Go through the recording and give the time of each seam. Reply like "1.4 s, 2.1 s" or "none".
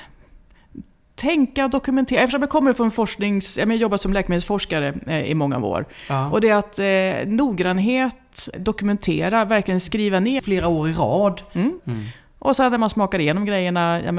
8.5 s, 10.4 s, 11.8 s